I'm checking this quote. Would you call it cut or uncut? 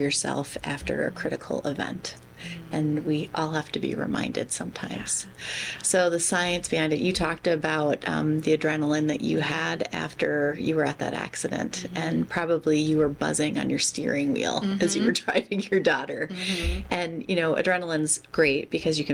uncut